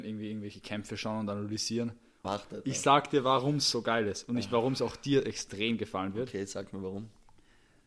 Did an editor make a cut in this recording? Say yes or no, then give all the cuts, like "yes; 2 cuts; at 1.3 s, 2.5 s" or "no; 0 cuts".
yes; 1 cut; at 2.2 s